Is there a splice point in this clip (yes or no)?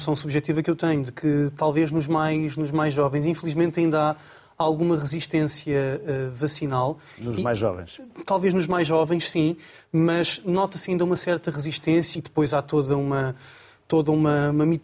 yes